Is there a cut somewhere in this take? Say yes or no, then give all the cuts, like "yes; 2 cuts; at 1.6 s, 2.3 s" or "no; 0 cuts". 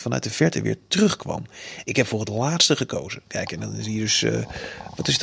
yes; 1 cut; at 1.8 s